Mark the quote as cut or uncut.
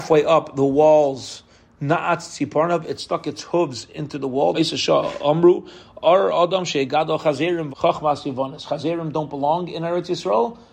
cut